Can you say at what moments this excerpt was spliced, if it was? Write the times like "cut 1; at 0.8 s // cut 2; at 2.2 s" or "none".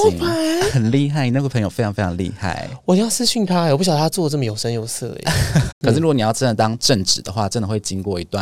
cut 1; at 5.7 s